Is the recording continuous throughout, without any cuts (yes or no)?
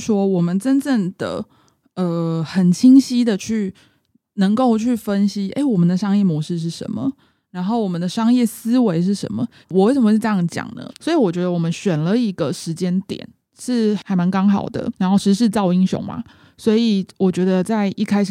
no